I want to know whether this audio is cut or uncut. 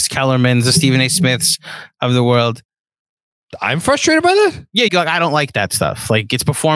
cut